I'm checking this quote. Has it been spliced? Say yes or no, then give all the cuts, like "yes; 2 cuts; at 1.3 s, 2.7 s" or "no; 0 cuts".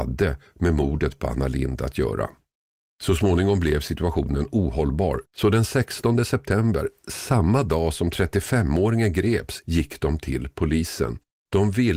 yes; 2 cuts; at 5.2 s, 9.6 s